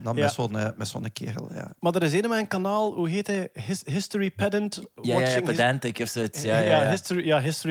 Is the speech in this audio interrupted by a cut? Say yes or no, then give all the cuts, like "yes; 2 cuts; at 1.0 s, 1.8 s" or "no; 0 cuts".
no; 0 cuts